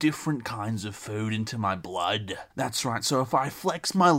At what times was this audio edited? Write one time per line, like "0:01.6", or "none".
0:02.5